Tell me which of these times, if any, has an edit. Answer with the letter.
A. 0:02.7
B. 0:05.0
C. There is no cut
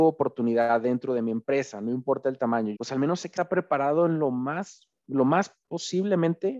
A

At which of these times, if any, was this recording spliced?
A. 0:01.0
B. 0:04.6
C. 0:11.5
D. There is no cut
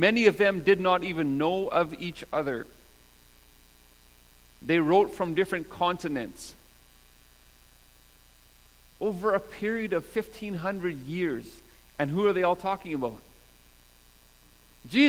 D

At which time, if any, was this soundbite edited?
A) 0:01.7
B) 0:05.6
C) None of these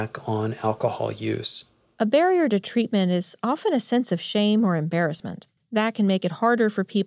B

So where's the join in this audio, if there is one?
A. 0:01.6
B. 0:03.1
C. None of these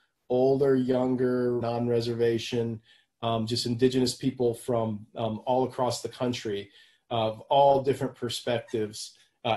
A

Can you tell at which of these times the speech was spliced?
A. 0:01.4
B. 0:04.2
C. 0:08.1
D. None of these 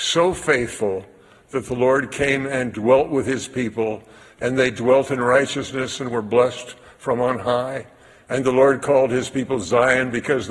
D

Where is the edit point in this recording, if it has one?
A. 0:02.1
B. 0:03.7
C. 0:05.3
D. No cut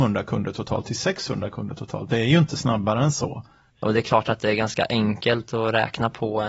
B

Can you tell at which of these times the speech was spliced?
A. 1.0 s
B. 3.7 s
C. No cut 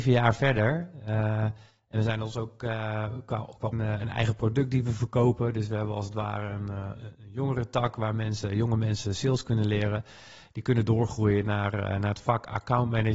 B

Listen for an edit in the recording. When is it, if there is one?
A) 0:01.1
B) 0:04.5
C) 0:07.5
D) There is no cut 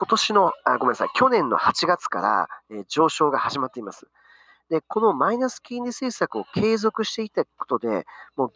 B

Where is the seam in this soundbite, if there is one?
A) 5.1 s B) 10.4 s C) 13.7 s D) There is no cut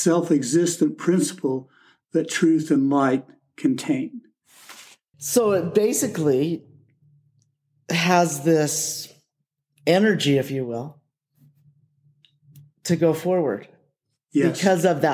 A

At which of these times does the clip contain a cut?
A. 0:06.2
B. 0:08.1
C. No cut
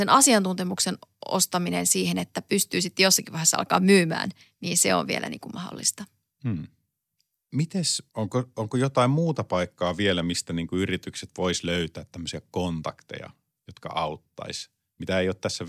B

